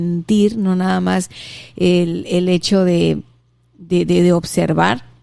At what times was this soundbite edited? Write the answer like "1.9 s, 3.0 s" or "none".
none